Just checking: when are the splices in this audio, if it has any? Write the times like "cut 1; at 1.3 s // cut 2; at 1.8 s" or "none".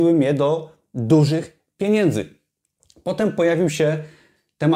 none